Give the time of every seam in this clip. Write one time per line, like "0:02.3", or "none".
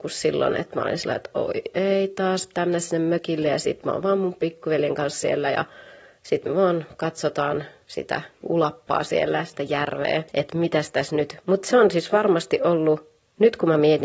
0:10.3